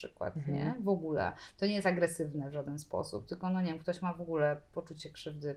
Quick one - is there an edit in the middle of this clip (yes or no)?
no